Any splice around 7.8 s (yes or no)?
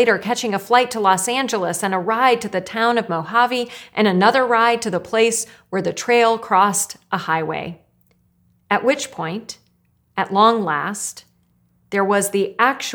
no